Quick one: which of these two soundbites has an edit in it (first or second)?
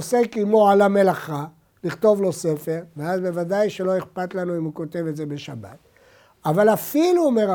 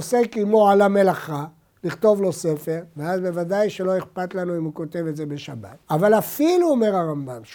second